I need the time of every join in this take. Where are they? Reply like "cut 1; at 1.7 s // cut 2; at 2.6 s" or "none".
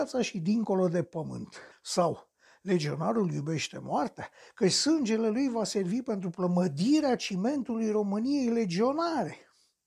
cut 1; at 1.7 s